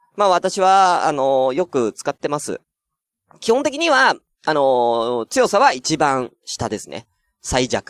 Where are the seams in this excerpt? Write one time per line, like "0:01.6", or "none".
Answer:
none